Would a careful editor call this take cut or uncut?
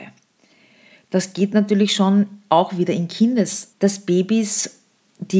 cut